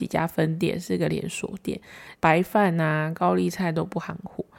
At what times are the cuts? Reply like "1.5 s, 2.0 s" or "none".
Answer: 2.1 s